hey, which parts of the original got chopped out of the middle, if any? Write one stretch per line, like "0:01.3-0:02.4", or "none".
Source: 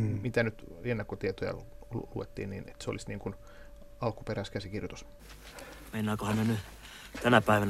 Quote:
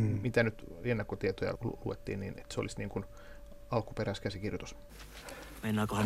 0:01.6-0:01.9